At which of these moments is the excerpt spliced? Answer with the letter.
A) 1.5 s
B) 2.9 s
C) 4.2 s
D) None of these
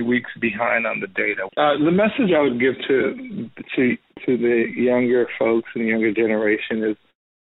A